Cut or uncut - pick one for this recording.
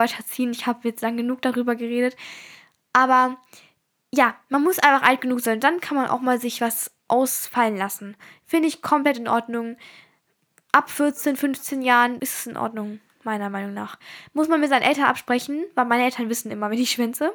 cut